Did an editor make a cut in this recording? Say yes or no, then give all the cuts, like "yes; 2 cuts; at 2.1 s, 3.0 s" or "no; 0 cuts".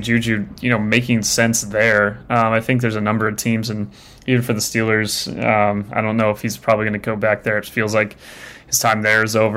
no; 0 cuts